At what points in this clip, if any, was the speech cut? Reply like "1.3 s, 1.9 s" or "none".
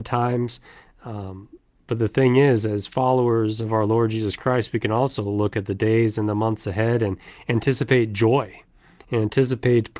none